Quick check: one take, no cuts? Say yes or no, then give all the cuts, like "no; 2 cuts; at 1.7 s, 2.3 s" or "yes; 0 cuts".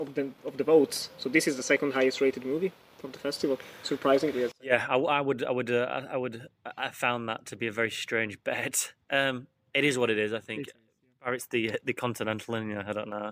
yes; 0 cuts